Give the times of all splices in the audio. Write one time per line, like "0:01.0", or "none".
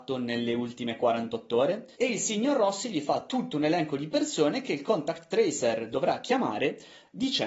0:01.9